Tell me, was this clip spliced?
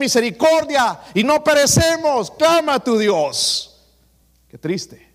no; 0 cuts

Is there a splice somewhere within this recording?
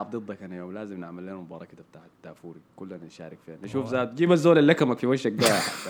yes; 1 cut; at 2.7 s

